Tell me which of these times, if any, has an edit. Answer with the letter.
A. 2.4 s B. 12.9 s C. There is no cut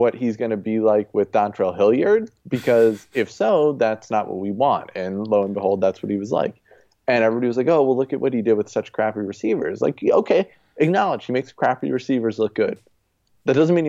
C